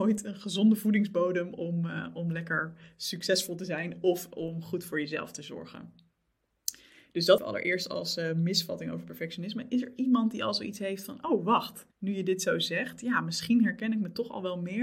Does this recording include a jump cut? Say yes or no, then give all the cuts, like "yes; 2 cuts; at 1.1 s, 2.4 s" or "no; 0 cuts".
yes; 2 cuts; at 7.4 s, 11.9 s